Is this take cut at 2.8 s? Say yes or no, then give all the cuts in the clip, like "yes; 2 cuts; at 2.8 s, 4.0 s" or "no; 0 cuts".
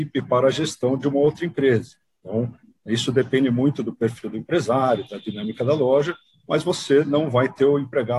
no; 0 cuts